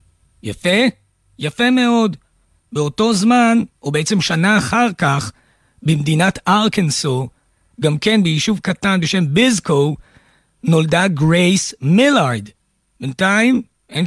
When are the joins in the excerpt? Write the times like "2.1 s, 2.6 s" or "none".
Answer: none